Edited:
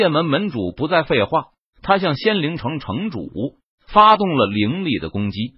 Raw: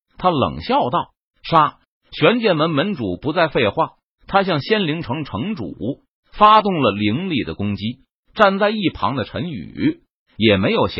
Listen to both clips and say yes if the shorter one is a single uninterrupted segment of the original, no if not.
yes